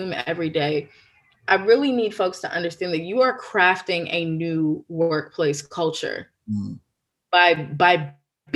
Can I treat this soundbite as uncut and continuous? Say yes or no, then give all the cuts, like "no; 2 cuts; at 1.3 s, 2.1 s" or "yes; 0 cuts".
yes; 0 cuts